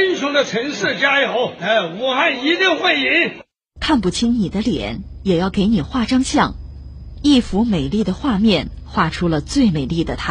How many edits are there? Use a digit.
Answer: 2